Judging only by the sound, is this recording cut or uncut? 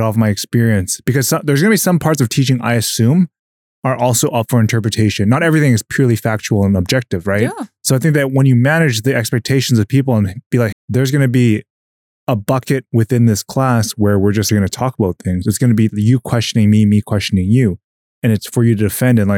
cut